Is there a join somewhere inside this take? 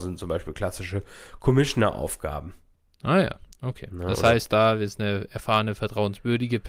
no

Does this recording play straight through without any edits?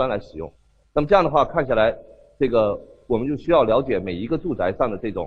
yes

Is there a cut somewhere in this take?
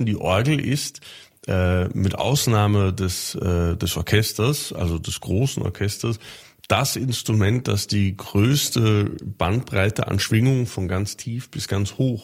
no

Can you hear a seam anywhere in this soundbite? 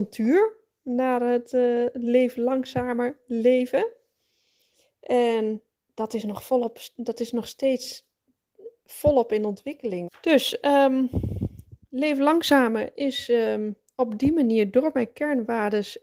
yes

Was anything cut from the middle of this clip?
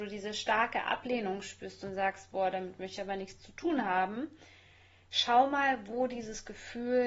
no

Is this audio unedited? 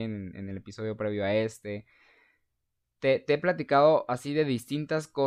yes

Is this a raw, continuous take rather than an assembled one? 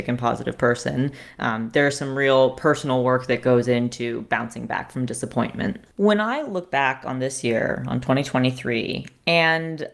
no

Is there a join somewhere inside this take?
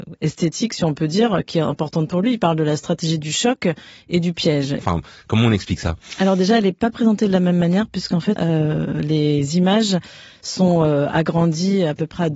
yes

